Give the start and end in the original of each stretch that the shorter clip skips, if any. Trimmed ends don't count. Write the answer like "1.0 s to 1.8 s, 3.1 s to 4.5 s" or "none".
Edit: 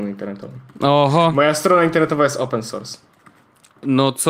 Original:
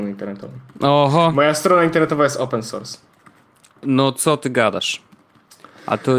none